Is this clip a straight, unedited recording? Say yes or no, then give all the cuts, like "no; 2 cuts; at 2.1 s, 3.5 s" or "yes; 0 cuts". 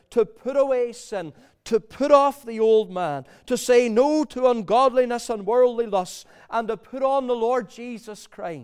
yes; 0 cuts